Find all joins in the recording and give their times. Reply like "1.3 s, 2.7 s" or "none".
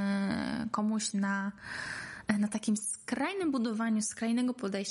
none